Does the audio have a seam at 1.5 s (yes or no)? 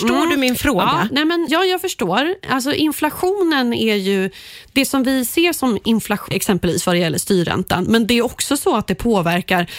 yes